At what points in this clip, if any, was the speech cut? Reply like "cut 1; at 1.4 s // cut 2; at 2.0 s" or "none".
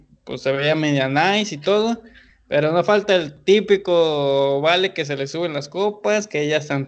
none